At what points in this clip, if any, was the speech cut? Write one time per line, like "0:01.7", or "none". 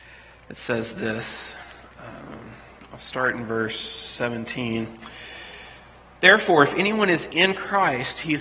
none